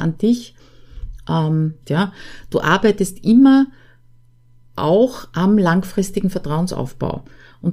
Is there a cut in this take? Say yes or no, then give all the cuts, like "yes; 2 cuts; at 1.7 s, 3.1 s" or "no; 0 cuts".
yes; 1 cut; at 1.8 s